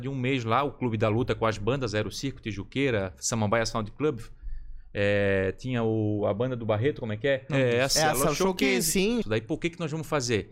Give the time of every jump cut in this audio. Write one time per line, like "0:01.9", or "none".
0:07.5
0:09.2